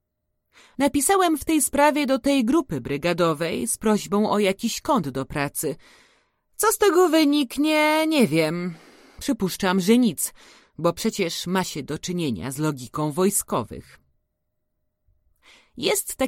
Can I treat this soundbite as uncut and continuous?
yes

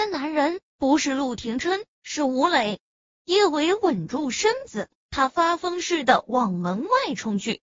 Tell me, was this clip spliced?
yes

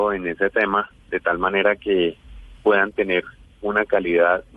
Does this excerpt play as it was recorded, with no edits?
no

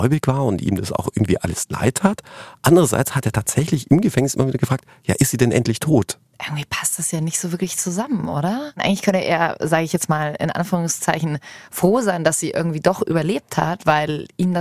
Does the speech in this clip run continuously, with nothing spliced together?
yes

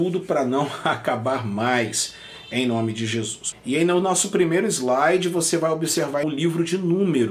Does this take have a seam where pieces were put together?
yes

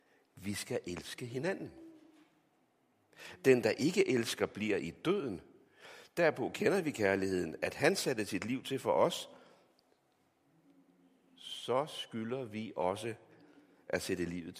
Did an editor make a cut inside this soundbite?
no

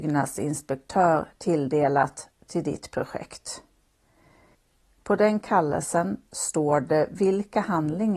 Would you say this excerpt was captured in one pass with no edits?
no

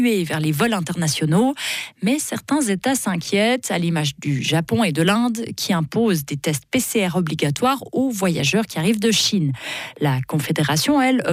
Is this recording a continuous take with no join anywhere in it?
yes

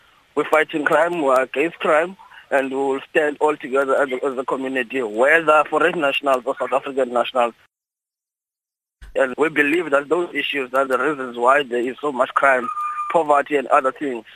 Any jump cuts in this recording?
yes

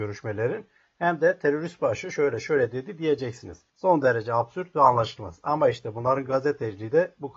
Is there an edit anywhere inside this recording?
no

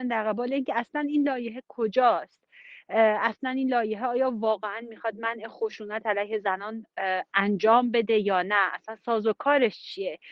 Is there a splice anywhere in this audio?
no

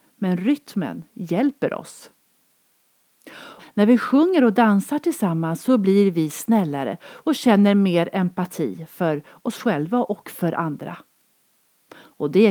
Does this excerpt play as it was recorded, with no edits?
no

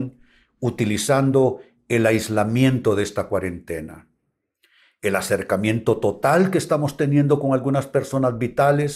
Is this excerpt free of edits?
yes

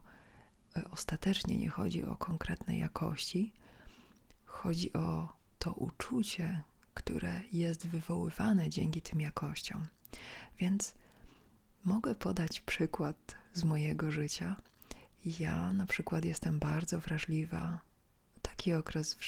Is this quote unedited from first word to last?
yes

